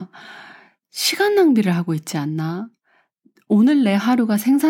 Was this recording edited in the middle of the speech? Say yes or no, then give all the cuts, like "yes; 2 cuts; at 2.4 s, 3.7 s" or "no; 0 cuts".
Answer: no; 0 cuts